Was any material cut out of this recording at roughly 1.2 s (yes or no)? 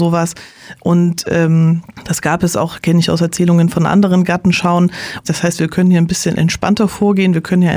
no